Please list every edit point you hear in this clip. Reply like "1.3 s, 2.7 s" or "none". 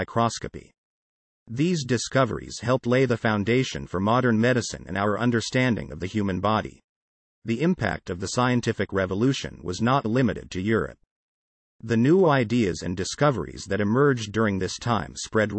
none